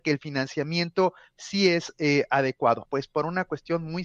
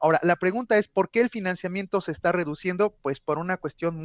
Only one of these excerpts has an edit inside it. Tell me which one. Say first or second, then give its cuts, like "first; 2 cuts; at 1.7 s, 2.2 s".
first; 1 cut; at 2.8 s